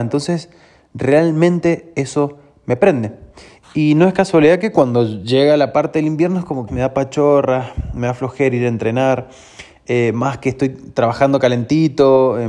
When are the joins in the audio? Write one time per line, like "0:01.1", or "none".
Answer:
0:03.6
0:06.7